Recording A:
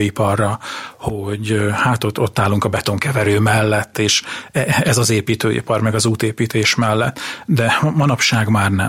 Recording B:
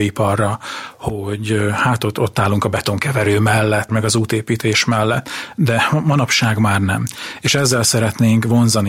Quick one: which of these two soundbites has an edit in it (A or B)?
B